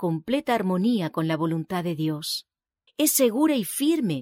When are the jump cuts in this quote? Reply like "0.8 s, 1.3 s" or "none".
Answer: 2.9 s